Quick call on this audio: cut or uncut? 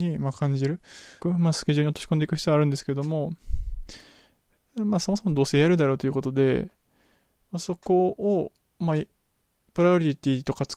cut